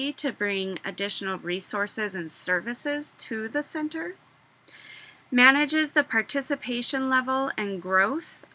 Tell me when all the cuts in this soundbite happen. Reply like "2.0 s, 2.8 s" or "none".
none